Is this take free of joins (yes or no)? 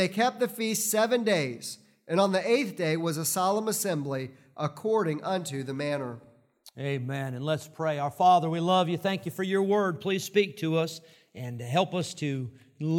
yes